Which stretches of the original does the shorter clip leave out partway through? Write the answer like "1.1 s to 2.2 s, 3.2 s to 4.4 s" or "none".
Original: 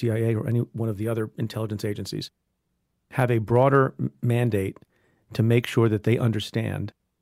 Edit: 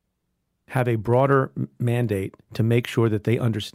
4.8 s to 5.2 s

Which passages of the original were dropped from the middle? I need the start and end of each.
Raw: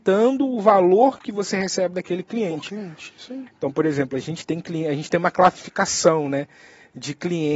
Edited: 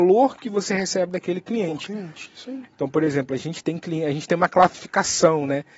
none

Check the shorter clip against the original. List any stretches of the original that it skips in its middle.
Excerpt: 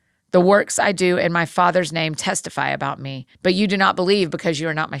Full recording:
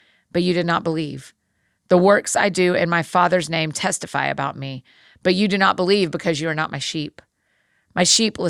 4.9 s to 5.2 s

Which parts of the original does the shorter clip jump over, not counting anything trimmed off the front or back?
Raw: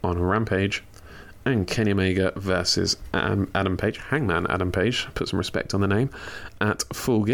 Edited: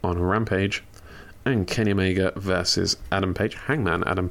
3.1 s to 3.5 s

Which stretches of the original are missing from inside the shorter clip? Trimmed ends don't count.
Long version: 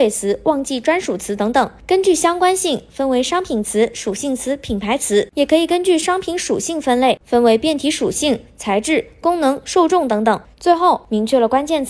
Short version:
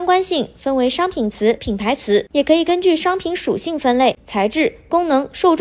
3.9 s to 4.6 s, 7.2 s to 8.5 s

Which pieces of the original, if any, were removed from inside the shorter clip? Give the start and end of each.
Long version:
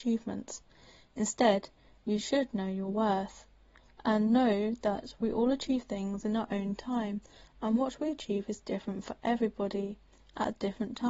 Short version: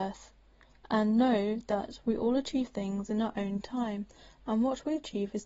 none

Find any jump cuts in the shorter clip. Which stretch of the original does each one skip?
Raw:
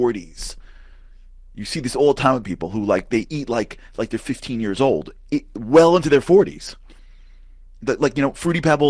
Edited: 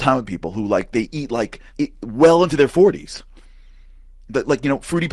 3.9 s to 5.2 s

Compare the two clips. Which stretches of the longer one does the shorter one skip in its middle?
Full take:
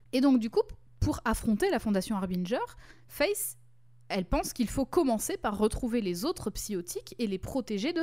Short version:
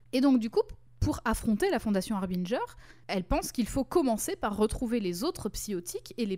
3.0 s to 4.0 s

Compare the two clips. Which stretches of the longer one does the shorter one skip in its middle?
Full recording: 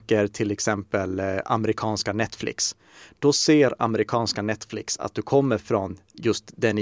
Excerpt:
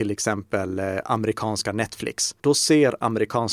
2.8 s to 3.2 s

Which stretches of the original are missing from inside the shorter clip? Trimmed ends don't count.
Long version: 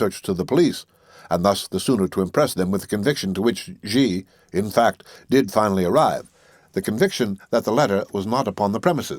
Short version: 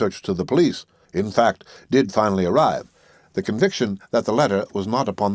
1.0 s to 4.4 s

